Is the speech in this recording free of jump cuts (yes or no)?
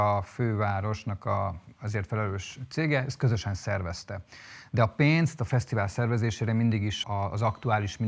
no